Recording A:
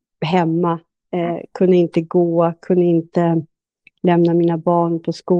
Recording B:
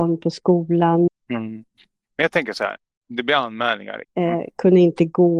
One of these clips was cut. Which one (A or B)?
B